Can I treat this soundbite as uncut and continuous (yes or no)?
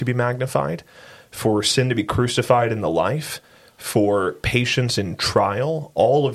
yes